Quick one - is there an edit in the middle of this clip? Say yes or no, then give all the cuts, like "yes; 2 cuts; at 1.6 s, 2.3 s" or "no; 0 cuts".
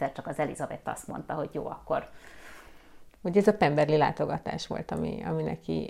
yes; 1 cut; at 3.1 s